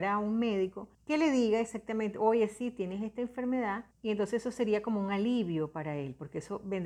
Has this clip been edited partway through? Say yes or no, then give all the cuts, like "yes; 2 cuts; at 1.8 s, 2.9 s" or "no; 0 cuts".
yes; 2 cuts; at 0.9 s, 3.9 s